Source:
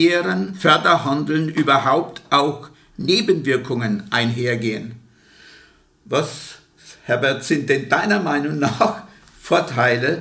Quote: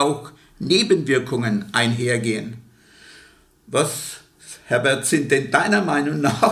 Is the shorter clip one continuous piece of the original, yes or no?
yes